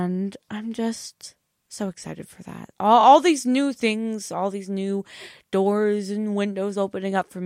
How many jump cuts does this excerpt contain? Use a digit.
0